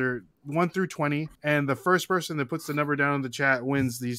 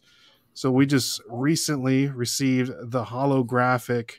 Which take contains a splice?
first; 1 cut; at 1.4 s

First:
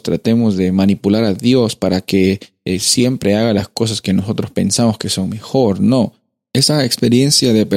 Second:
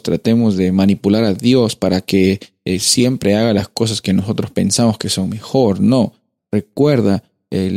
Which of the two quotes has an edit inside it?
second; 1 cut; at 6.4 s

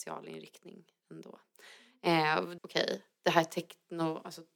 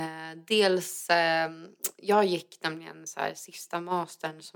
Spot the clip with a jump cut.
first; 1 cut; at 2.6 s

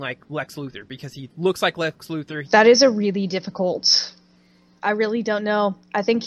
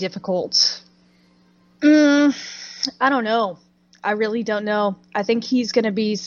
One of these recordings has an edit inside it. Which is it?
first; 2 cuts; at 2.4 s, 4.8 s

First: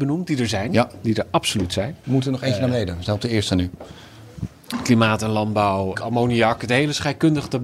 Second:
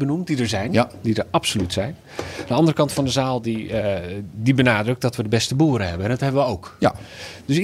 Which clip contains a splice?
first; 2 cuts; at 2.0 s, 5.9 s

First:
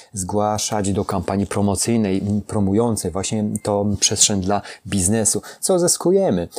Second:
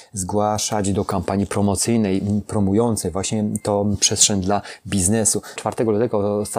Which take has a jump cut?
second; 1 cut; at 5.6 s

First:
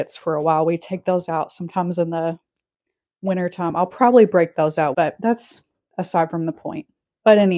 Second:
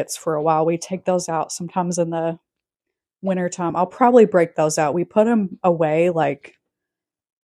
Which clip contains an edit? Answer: first; 1 cut; at 4.9 s

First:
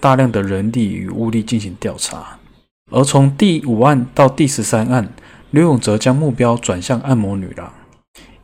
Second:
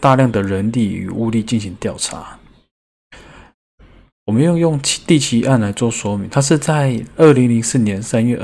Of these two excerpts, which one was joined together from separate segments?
first; 1 cut; at 2.8 s

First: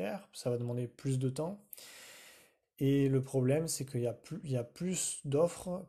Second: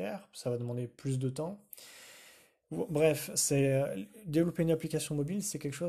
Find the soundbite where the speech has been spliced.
first; 1 cut; at 2.6 s

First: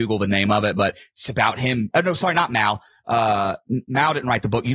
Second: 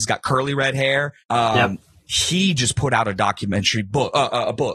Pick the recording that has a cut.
second; 1 cut; at 1.2 s

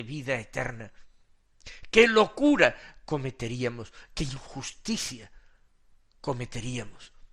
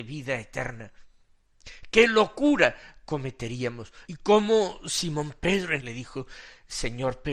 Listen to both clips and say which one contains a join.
second; 2 cuts; at 4.1 s, 5.8 s

